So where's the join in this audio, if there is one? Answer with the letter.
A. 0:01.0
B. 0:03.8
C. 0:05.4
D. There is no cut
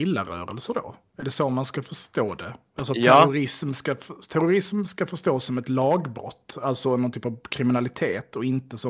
D